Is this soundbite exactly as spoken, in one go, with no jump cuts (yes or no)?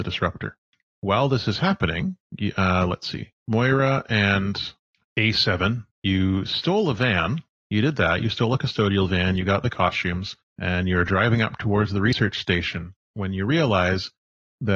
yes